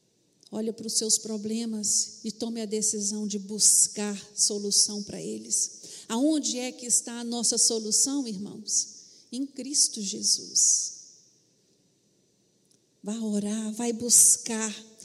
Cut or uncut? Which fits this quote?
cut